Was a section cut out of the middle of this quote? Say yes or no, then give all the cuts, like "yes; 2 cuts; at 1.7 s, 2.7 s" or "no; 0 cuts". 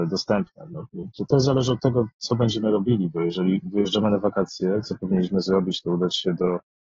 yes; 1 cut; at 4.8 s